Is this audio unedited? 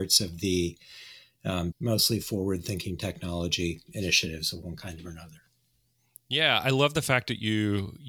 no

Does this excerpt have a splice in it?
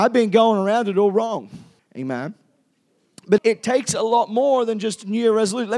yes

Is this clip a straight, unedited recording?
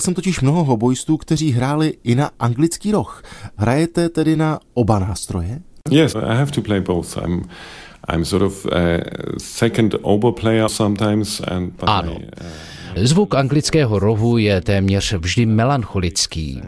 no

